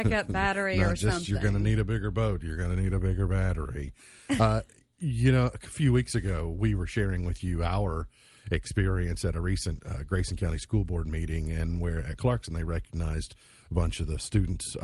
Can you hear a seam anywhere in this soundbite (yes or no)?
no